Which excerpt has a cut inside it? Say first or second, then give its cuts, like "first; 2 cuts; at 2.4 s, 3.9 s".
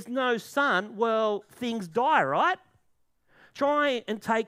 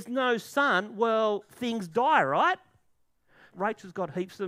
second; 1 cut; at 3.5 s